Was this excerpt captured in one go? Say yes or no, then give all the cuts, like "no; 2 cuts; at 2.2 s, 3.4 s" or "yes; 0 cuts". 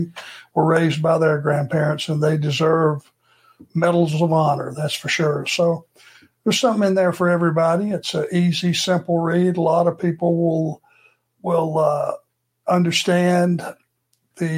yes; 0 cuts